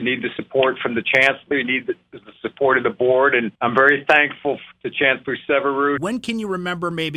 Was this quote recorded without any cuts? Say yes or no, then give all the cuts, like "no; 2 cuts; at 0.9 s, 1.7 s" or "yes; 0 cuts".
no; 2 cuts; at 3.6 s, 6.0 s